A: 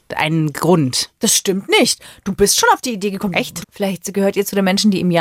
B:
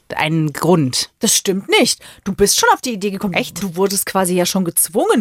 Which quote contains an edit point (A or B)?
A